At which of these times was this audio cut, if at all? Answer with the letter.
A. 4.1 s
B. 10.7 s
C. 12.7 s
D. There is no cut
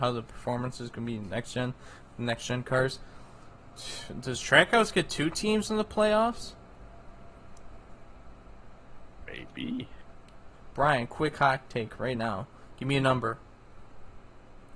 B